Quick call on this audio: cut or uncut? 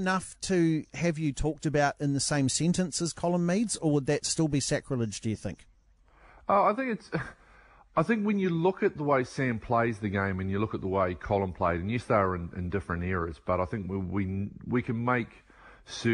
uncut